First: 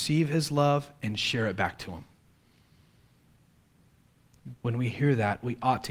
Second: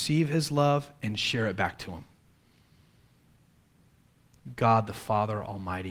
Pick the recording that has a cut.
first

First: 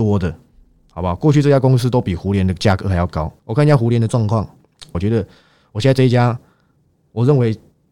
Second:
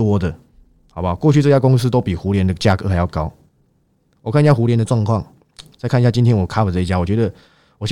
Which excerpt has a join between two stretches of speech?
first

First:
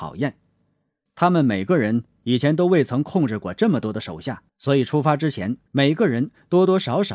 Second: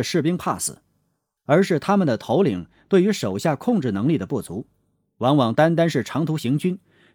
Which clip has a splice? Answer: first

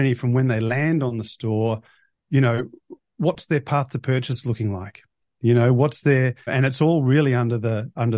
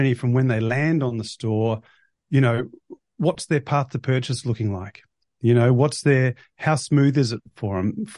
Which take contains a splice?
first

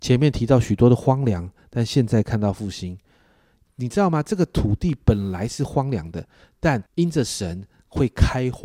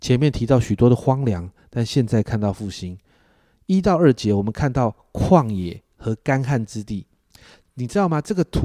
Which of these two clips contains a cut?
first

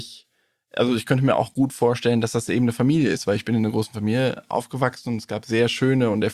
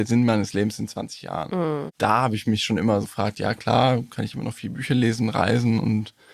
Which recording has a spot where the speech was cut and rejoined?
second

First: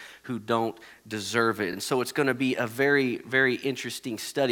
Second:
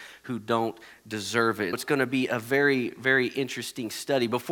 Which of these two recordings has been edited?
second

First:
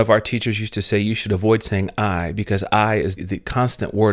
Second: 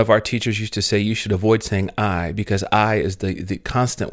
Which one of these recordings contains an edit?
first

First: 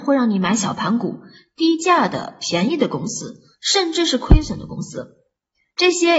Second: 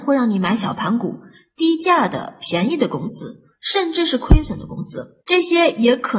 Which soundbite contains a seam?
second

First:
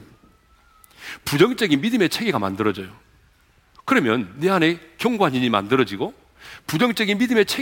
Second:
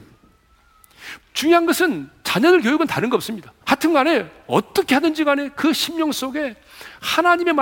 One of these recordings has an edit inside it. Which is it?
second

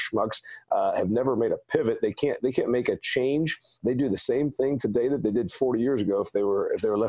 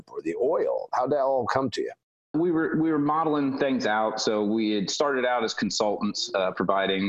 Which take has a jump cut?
second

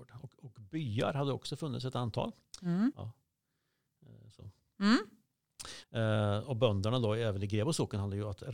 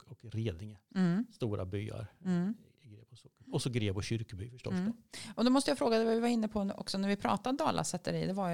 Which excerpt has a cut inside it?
first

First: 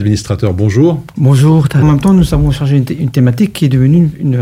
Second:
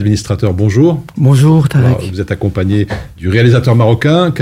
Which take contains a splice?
first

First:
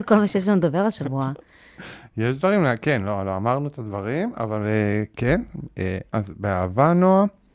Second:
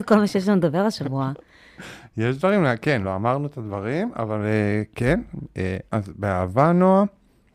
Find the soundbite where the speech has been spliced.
second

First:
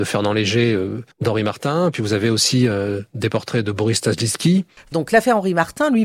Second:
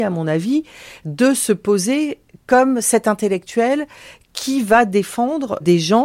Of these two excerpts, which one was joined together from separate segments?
first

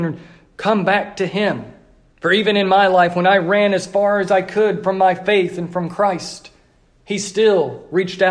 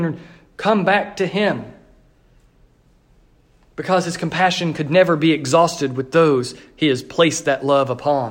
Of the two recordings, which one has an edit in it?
first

